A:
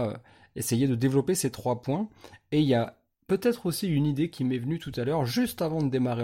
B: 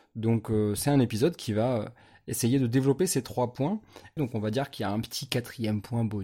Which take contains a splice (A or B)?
B